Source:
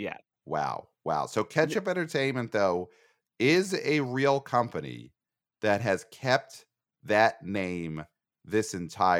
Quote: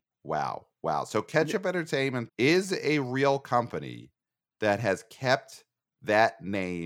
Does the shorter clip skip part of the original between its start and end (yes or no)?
yes